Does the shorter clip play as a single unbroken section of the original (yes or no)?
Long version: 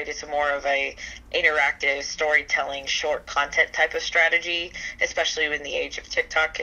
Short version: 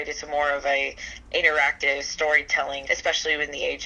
no